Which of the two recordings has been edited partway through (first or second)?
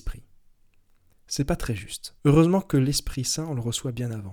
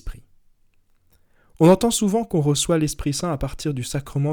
first